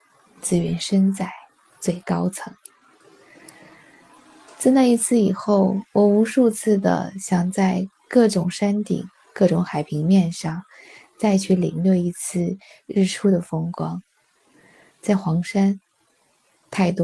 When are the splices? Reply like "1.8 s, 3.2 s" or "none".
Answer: none